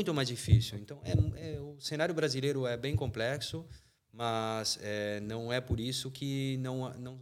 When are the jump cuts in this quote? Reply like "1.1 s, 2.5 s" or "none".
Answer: none

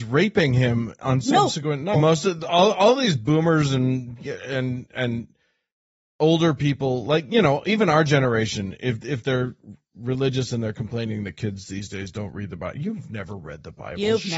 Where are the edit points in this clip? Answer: 1.9 s

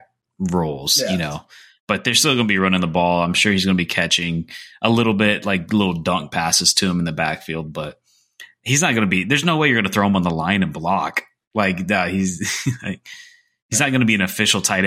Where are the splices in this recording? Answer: none

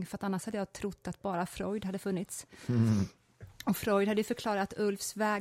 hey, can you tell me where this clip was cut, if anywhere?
none

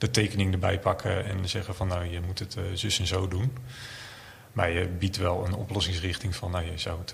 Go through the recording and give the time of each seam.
none

